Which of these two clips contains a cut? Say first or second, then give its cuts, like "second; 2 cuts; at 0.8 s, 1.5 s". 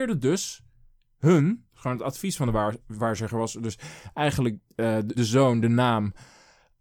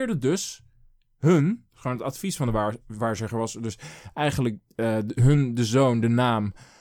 first; 1 cut; at 5.1 s